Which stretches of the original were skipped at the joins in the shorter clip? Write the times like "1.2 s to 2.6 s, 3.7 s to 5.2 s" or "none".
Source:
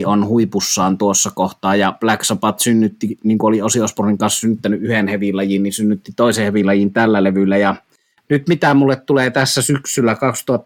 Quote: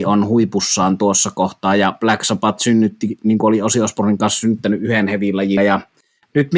5.6 s to 7.5 s